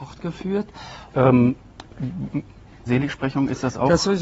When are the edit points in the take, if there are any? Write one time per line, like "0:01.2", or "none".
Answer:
0:01.1
0:02.9